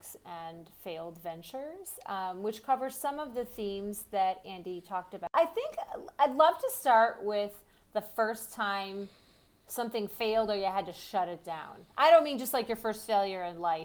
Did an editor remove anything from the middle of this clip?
no; 0 cuts

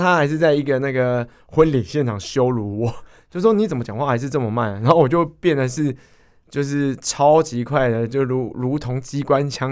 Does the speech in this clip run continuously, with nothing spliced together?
yes; 0 cuts

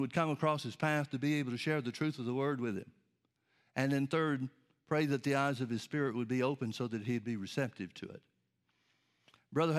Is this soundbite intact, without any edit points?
yes; 0 cuts

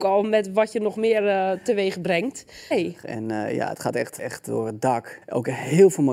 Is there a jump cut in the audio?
yes; 3 cuts; at 2.7 s, 4.2 s, 5.2 s

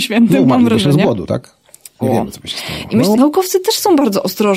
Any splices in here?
yes; 2 cuts; at 2.0 s, 3.1 s

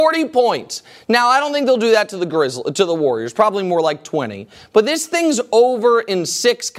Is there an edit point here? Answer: no; 0 cuts

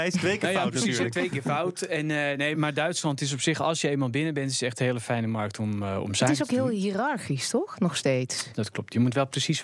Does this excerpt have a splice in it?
yes; 2 cuts; at 2.5 s, 8.5 s

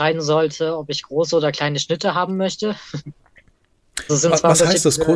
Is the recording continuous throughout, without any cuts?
no; 1 cut; at 4.1 s

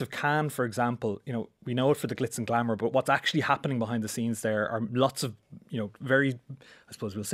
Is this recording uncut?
yes; 0 cuts

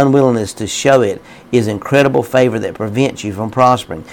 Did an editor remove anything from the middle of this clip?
no; 0 cuts

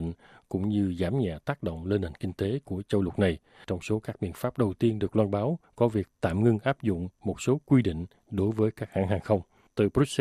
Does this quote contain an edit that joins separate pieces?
no; 0 cuts

